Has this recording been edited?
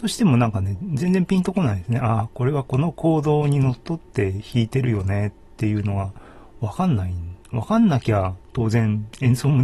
no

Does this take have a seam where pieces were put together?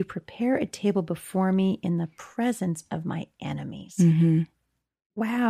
no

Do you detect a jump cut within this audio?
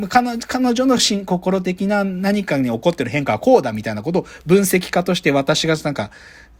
no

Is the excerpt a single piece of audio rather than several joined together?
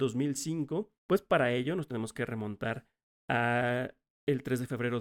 no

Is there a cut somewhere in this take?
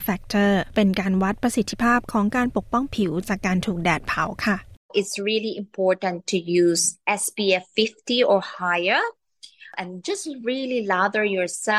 no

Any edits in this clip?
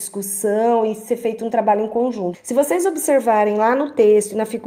yes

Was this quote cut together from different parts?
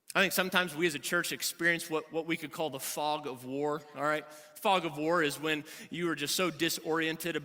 no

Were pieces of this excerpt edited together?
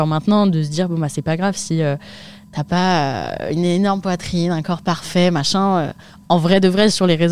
no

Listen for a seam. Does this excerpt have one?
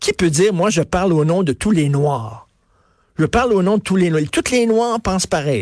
no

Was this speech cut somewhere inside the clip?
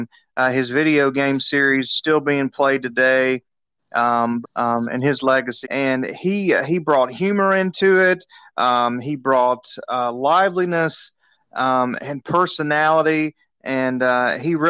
yes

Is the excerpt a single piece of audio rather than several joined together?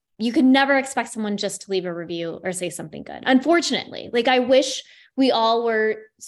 yes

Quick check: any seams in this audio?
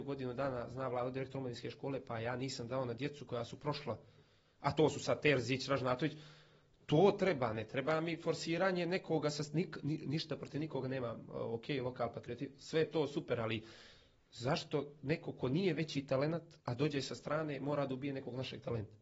yes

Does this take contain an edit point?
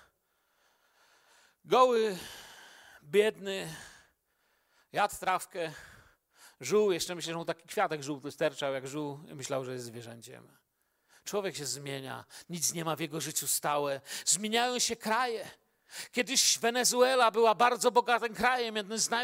no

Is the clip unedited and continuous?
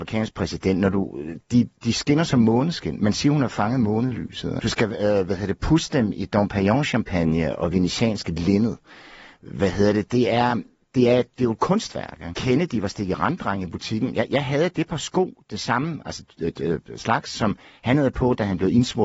no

